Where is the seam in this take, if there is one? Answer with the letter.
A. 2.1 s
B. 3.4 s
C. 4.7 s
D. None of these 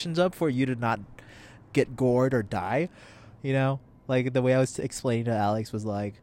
B